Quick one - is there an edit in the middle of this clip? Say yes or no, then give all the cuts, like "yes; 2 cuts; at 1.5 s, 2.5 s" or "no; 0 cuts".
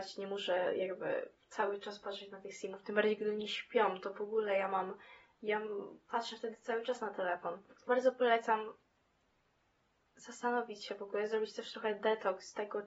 no; 0 cuts